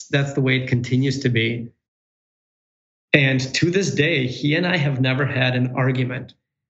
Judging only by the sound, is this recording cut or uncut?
uncut